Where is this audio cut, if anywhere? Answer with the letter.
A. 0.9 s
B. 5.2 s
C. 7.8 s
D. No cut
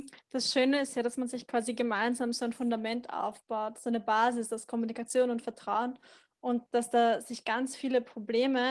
D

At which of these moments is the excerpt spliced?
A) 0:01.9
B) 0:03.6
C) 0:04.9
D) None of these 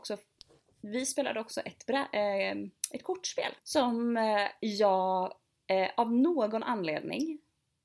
B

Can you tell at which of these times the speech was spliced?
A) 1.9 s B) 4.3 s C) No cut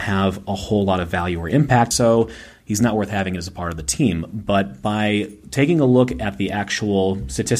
A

